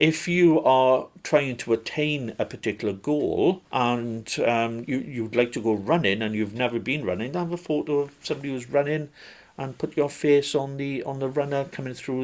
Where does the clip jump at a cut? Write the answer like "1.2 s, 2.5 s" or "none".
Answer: 3.7 s

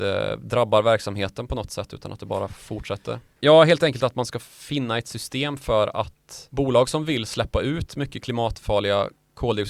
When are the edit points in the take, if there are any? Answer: 3.4 s

